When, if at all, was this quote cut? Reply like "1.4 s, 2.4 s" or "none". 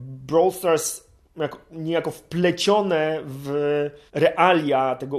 4.1 s